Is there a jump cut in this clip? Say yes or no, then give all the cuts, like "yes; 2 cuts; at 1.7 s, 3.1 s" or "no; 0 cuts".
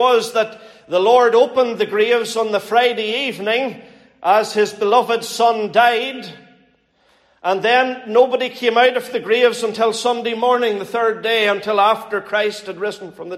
no; 0 cuts